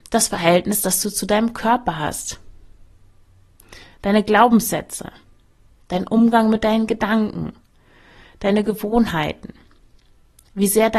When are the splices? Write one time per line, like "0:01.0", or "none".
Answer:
none